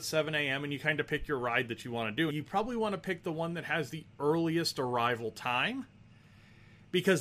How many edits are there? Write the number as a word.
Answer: one